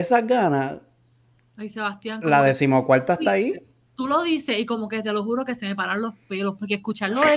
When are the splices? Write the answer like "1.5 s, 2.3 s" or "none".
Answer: none